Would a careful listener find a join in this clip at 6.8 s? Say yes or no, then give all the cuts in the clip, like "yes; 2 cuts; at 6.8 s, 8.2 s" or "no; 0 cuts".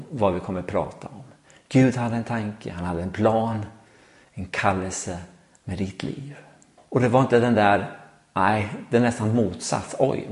yes; 1 cut; at 6.8 s